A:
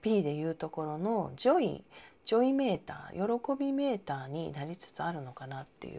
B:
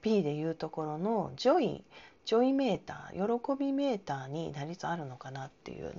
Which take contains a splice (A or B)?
B